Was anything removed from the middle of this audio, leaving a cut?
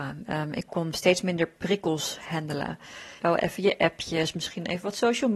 yes; 1 cut; at 3.2 s

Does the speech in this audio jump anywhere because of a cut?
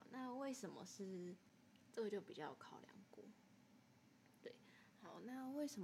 yes; 2 cuts; at 1.9 s, 4.9 s

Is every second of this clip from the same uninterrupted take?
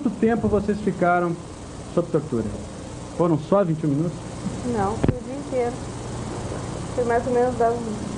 yes; 0 cuts

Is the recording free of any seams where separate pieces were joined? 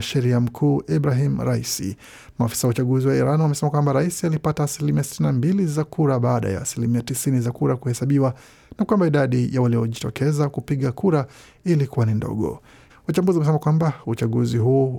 no; 1 cut; at 12.9 s

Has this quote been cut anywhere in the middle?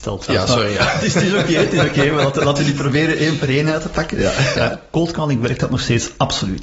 yes; 1 cut; at 4.5 s

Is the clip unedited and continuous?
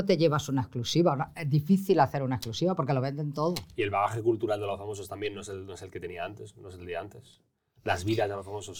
yes; 0 cuts

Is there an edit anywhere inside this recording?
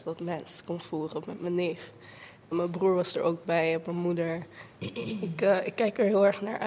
yes; 2 cuts; at 2.5 s, 4.7 s

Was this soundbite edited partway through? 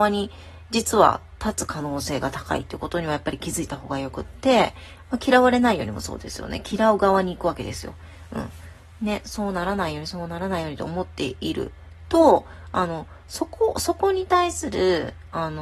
no; 0 cuts

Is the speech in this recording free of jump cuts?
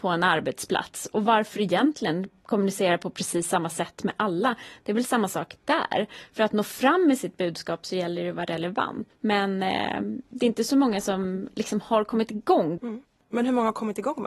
no; 2 cuts; at 9.1 s, 12.8 s

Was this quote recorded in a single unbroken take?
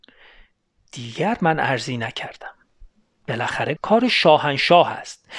no; 1 cut; at 3.8 s

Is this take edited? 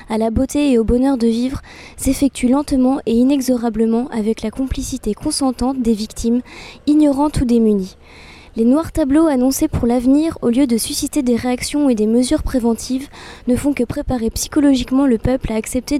no; 0 cuts

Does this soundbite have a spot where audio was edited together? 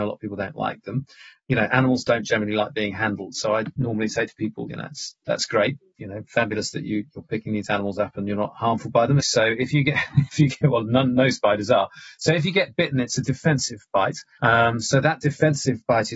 yes; 2 cuts; at 9.2 s, 14.4 s

